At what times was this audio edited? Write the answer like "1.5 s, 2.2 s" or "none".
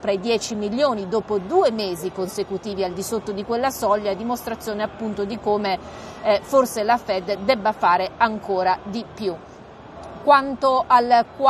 none